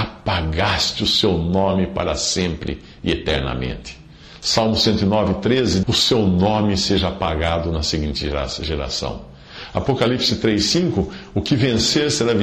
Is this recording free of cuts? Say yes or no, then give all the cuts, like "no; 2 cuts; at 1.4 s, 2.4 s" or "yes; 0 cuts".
no; 1 cut; at 5.8 s